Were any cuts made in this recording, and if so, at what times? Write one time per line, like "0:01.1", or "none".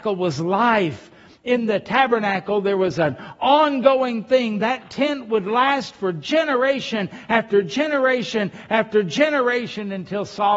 none

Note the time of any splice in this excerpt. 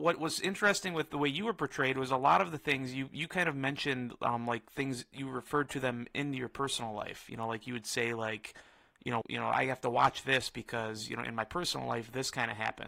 0:09.2

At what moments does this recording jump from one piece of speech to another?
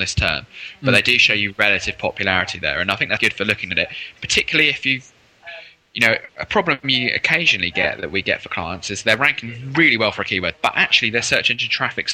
0:03.2
0:10.5

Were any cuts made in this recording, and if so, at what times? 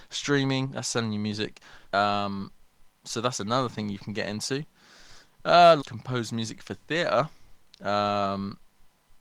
0:01.9
0:05.8

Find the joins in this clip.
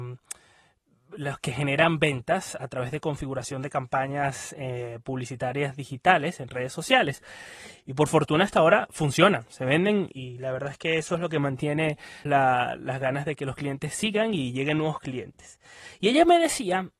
0:07.8
0:10.1
0:12.3

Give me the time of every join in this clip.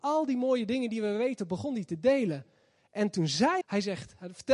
0:03.6

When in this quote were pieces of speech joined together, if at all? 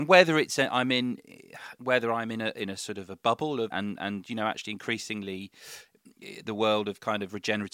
0:03.7

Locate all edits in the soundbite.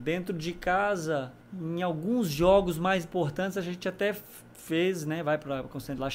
0:01.4

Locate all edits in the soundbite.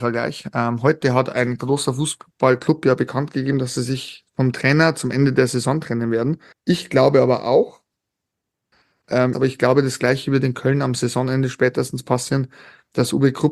0:06.5
0:09.3

